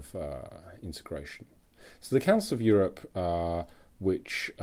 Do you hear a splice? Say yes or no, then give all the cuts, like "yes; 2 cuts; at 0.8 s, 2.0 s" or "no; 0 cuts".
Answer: no; 0 cuts